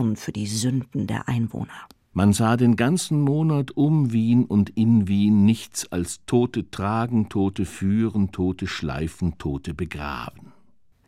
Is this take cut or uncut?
cut